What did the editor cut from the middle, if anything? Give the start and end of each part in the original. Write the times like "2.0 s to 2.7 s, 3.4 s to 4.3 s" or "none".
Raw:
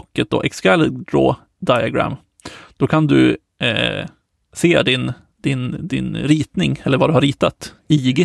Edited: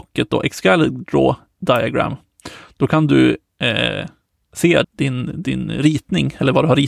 4.8 s to 5.3 s